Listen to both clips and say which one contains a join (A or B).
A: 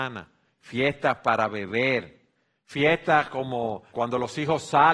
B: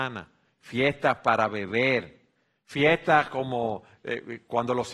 A